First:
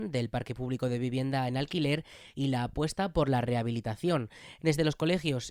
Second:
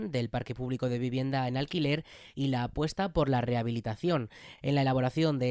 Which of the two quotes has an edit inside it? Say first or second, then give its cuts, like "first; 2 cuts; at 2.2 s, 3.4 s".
first; 1 cut; at 4.6 s